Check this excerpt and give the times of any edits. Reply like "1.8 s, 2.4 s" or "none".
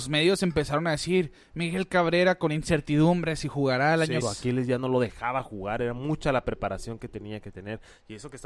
4.2 s

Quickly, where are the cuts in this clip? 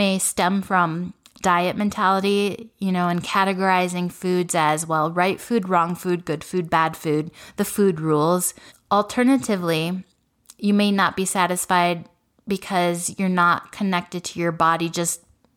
8.7 s

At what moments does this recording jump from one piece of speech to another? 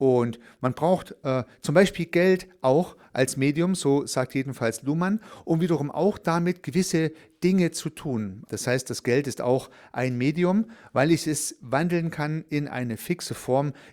8.4 s

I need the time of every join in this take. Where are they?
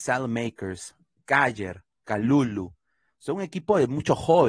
none

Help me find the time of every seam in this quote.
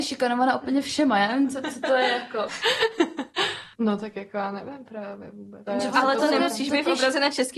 2.5 s, 5.7 s

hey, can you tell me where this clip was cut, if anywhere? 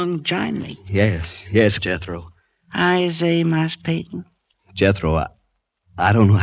1.8 s, 4.5 s

